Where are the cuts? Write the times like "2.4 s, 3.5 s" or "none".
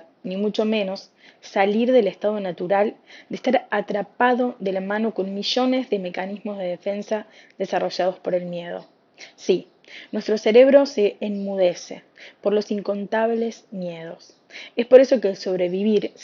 none